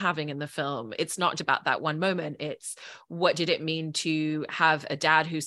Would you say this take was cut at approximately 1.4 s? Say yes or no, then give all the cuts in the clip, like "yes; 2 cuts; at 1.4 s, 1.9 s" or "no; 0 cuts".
yes; 1 cut; at 1.4 s